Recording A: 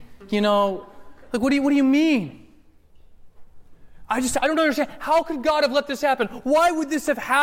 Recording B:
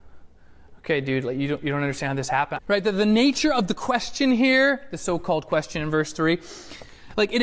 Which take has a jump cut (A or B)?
B